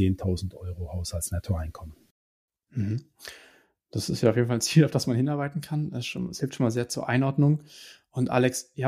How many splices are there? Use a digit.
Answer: 0